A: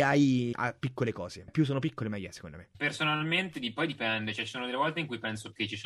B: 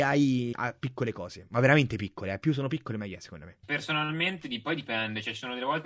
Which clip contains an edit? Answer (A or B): A